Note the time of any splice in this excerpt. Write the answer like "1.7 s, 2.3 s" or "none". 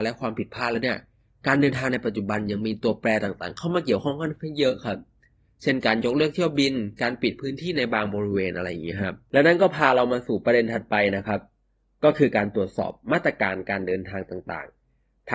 none